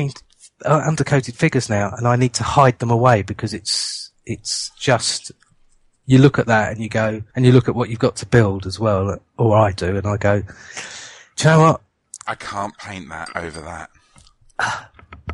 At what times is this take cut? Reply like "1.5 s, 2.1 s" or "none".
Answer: 7.3 s, 12.3 s